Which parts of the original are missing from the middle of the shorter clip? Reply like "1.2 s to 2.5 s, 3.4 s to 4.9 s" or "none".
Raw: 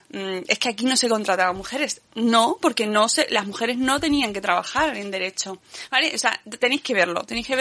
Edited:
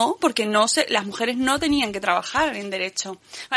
none